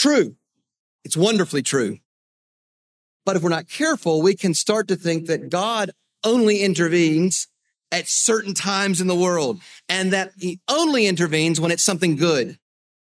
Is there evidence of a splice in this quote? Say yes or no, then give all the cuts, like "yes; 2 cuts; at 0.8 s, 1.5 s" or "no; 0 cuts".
no; 0 cuts